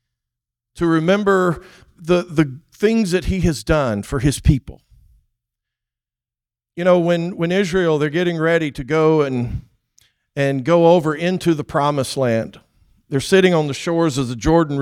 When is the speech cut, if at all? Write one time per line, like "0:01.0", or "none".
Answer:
none